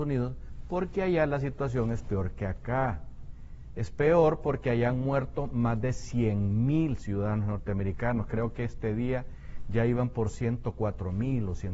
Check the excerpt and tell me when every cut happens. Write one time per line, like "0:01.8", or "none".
none